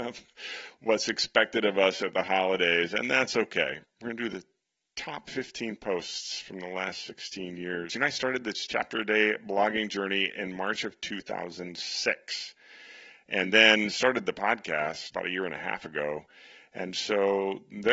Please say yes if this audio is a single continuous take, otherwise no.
no